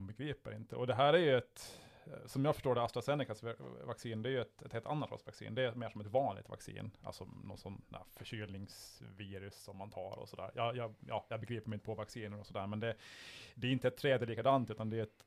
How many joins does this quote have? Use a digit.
1